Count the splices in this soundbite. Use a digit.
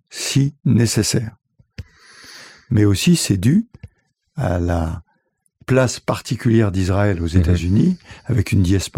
0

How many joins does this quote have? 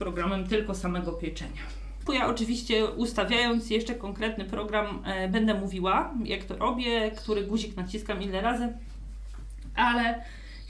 1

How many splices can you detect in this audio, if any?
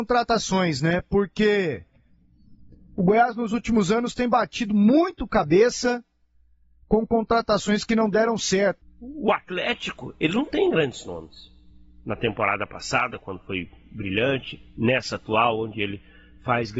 1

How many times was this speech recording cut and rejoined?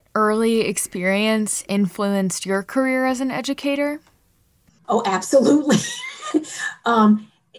0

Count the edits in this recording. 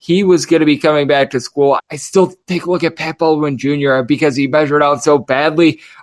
1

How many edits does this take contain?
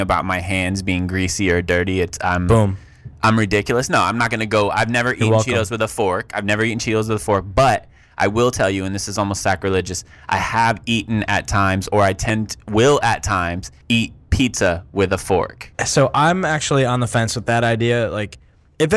1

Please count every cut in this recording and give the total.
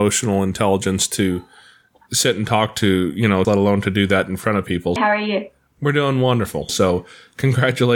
3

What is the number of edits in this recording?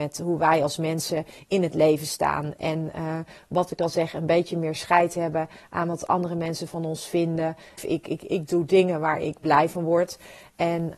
1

